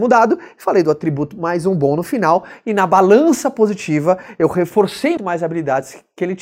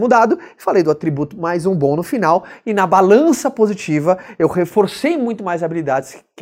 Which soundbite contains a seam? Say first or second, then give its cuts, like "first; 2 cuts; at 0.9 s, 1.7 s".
first; 1 cut; at 5.2 s